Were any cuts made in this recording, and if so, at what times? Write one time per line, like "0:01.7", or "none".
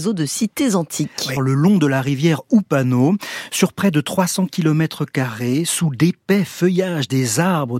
0:01.4